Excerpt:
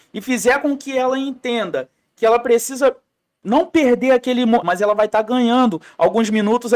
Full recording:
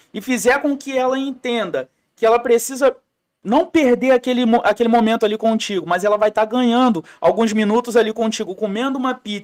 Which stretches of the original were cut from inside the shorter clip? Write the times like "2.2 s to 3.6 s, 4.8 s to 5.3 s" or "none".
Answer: 4.6 s to 5.8 s